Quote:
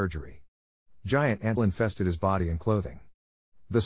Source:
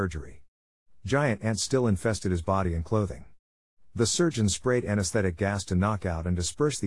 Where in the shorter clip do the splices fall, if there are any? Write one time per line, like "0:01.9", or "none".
0:01.6